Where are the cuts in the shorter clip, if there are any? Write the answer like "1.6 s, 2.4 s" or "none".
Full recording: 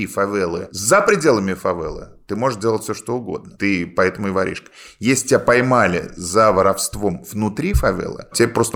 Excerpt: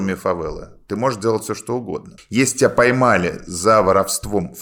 2.2 s